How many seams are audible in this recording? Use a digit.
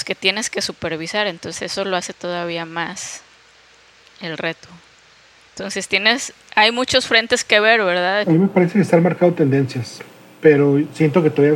2